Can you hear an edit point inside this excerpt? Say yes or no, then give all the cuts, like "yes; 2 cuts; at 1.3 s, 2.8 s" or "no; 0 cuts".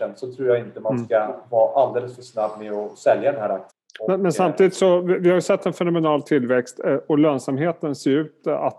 no; 0 cuts